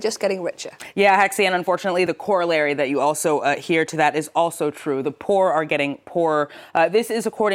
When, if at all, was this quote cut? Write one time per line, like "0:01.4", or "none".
none